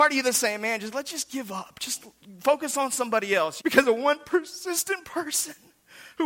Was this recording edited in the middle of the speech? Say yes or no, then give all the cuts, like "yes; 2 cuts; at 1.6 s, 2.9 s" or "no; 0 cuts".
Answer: yes; 1 cut; at 3.6 s